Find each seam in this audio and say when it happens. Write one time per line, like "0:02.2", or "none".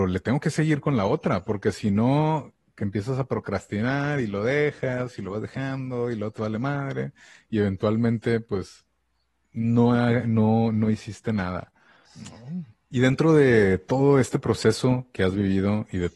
0:12.1